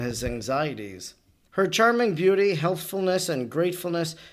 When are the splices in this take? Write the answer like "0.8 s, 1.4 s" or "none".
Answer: 1.5 s